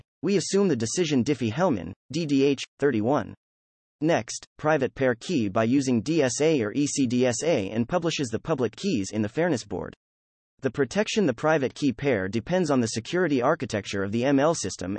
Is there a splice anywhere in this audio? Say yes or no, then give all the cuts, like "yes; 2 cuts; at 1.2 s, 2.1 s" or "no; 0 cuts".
yes; 2 cuts; at 2.7 s, 4.5 s